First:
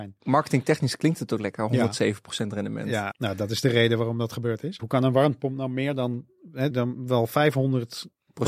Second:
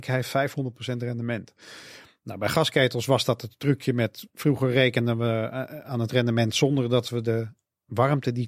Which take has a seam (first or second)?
first